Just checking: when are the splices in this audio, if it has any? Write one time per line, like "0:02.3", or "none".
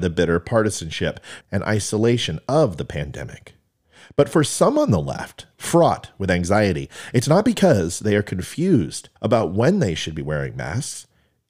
0:01.4
0:05.5
0:09.2